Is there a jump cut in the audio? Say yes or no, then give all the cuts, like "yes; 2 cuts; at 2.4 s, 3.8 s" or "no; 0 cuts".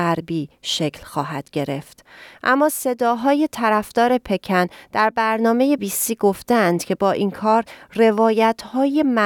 yes; 2 cuts; at 2.3 s, 5.8 s